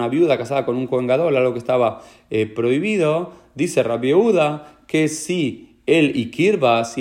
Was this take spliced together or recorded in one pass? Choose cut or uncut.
uncut